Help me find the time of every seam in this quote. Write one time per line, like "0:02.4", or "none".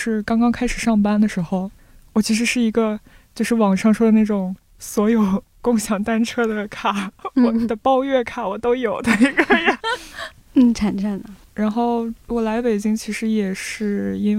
0:09.8
0:11.4